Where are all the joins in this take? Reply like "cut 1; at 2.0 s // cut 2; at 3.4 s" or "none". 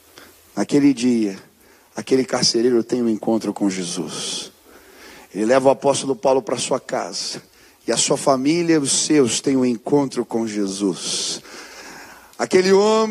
none